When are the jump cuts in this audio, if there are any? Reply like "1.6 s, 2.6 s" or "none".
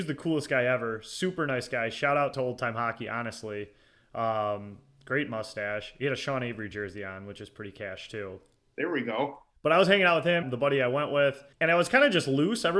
10.4 s, 11.5 s